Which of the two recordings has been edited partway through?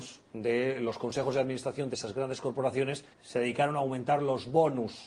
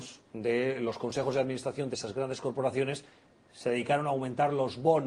first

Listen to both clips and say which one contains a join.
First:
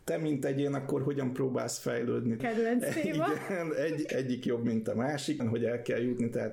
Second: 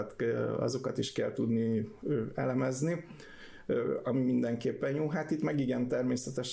first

